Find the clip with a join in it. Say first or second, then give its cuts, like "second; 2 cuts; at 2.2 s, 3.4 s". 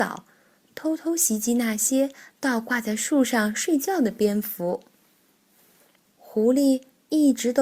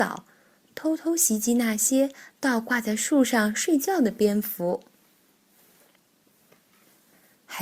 first; 1 cut; at 6.1 s